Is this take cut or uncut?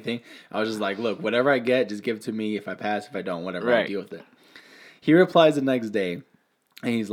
uncut